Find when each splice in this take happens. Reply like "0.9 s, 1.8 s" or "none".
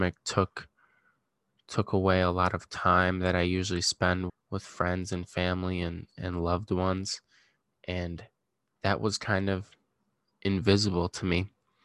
4.3 s